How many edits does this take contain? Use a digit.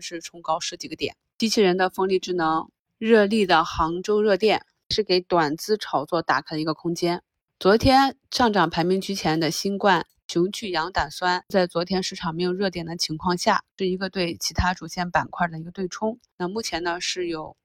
1